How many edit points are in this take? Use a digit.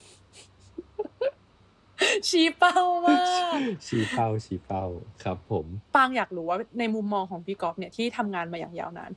1